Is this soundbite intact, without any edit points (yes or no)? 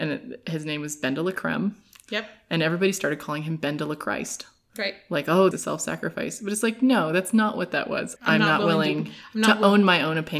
no